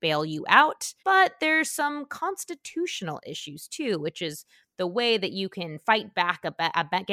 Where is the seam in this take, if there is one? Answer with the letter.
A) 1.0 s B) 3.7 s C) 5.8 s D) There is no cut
A